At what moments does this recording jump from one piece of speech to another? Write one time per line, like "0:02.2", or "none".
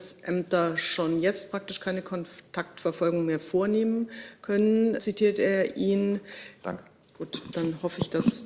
0:05.0
0:06.6